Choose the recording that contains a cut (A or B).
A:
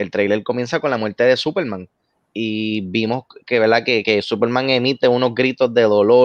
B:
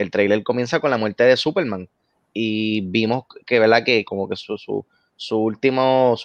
B